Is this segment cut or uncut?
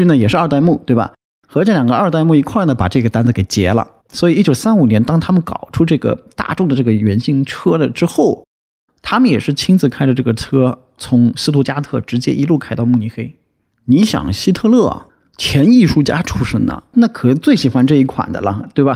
cut